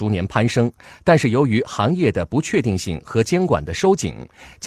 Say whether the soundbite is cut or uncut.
uncut